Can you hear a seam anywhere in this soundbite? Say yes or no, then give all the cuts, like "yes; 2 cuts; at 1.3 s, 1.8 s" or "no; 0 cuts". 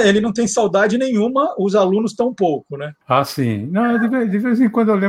yes; 1 cut; at 3.0 s